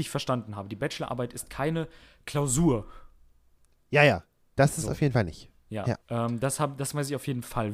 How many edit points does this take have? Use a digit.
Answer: 1